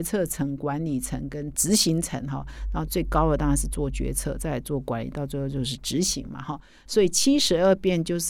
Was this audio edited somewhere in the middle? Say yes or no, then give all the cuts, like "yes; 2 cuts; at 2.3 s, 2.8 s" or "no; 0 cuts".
no; 0 cuts